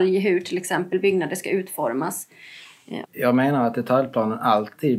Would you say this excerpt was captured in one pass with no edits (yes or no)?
no